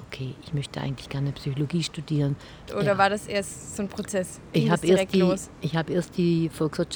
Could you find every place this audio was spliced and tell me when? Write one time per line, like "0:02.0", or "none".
0:02.7